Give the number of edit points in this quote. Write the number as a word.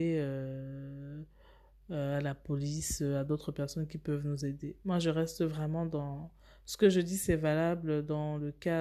zero